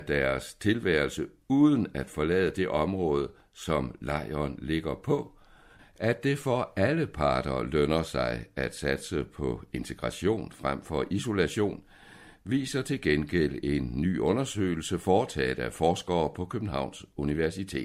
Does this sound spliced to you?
yes; 1 cut; at 5.8 s

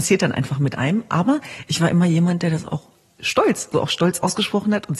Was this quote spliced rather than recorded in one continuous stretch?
yes; 1 cut; at 3.7 s

